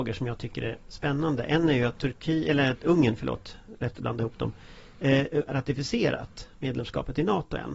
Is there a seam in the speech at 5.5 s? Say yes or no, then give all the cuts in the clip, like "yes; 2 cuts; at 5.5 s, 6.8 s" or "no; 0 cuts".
yes; 1 cut; at 5.5 s